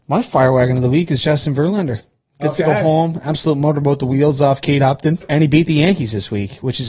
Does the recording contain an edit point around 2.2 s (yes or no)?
no